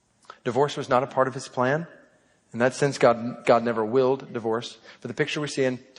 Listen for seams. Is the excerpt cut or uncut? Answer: cut